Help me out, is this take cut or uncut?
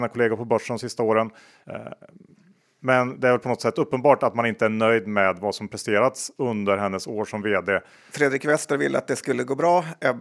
cut